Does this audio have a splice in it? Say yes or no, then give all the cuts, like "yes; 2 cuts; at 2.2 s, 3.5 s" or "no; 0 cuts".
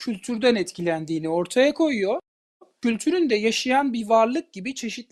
no; 0 cuts